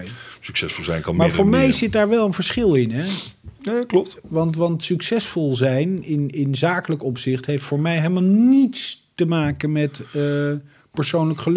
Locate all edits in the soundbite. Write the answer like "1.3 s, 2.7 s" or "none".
none